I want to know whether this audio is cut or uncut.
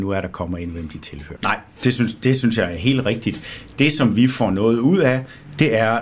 cut